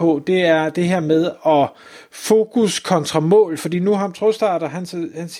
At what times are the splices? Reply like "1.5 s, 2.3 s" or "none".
none

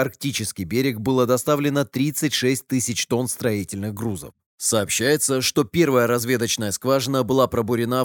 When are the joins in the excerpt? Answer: 4.5 s

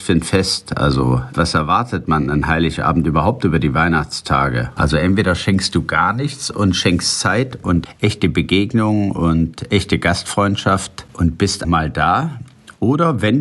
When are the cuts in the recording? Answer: 4.8 s, 11.6 s

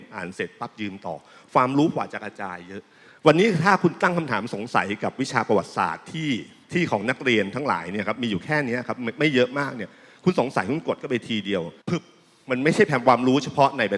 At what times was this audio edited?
11.8 s

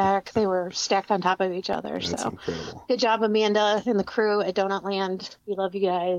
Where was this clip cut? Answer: 2.8 s

